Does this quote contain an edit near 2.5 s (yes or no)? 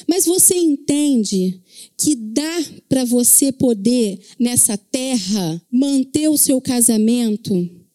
no